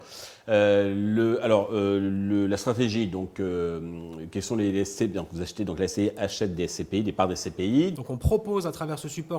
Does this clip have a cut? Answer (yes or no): yes